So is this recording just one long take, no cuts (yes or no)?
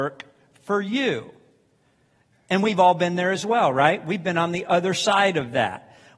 yes